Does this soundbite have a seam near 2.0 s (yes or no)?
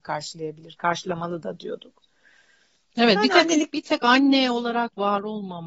no